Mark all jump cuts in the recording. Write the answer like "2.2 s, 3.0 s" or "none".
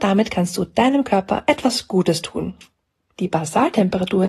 3.1 s